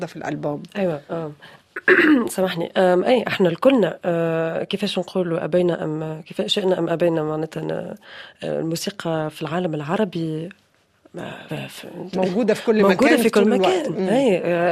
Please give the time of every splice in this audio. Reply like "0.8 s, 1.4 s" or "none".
11.5 s